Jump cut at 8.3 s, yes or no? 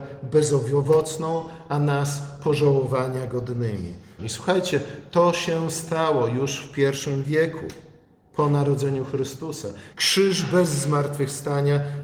no